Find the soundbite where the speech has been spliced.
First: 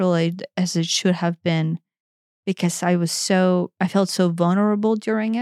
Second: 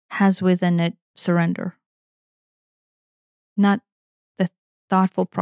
second; 1 cut; at 1.0 s

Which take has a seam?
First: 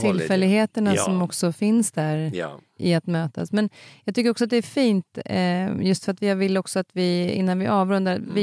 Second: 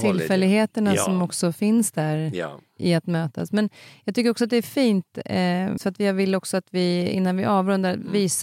second; 1 cut; at 5.8 s

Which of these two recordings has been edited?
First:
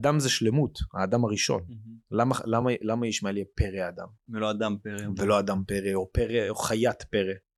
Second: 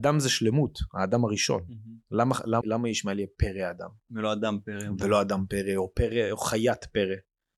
second; 1 cut; at 2.6 s

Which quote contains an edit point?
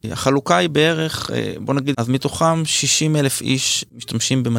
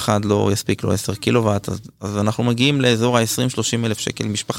first; 1 cut; at 1.9 s

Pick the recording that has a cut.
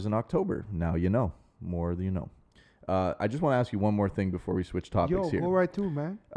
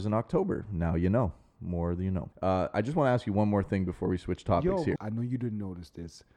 second; 2 cuts; at 2.3 s, 5.0 s

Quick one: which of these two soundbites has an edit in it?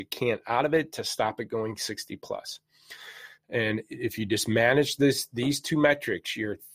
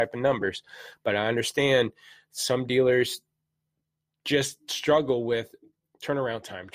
first; 1 cut; at 3.4 s

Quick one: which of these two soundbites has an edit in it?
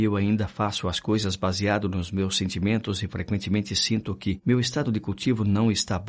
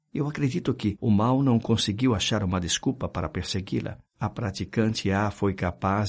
second; 1 cut; at 1.0 s

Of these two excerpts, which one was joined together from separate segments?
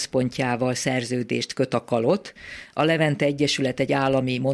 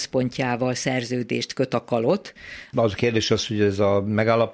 second; 1 cut; at 2.7 s

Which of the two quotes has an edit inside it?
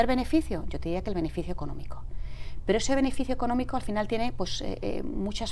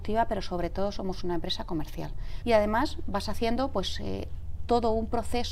second; 1 cut; at 2.4 s

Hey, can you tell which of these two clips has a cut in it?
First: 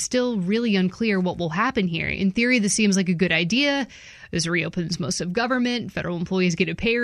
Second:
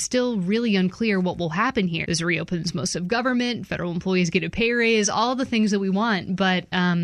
second; 1 cut; at 2.0 s

